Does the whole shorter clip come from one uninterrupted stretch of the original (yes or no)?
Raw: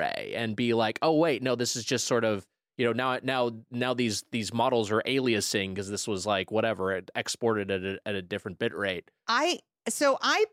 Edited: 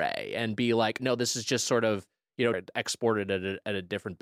no